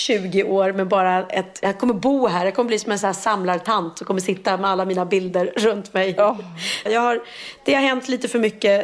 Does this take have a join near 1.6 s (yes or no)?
no